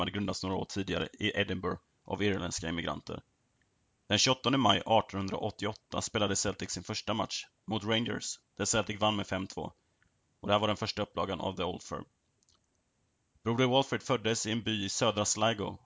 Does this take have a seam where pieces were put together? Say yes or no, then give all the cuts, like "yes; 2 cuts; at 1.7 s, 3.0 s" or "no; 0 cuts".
no; 0 cuts